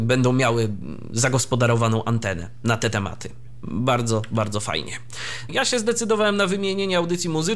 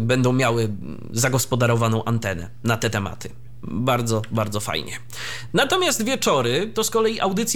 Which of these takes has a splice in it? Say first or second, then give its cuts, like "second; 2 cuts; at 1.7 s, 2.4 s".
first; 1 cut; at 5.5 s